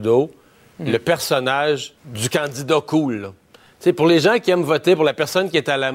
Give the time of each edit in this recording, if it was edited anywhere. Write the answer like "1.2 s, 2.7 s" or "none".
2.0 s